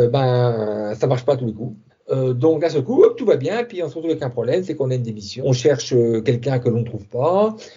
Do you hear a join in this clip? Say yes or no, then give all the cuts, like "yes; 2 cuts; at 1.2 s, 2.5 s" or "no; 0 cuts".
yes; 2 cuts; at 1.9 s, 5.4 s